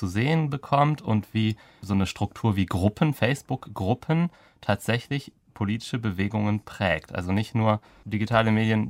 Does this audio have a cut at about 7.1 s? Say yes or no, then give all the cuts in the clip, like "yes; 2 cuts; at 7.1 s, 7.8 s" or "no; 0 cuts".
no; 0 cuts